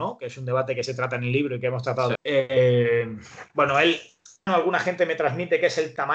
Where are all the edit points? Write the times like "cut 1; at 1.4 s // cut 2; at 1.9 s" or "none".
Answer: cut 1; at 2.2 s // cut 2; at 4.5 s